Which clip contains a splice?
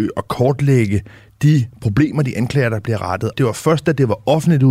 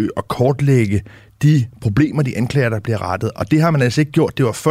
first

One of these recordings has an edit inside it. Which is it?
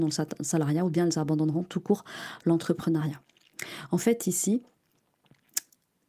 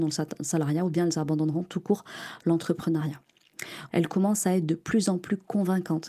second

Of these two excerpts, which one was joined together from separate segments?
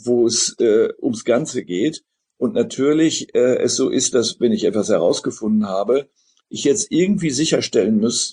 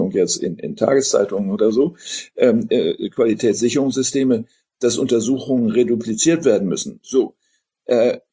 second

